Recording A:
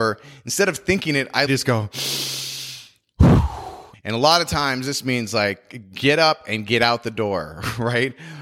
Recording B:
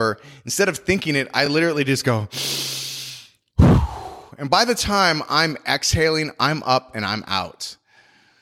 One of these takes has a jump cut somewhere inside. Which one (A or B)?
A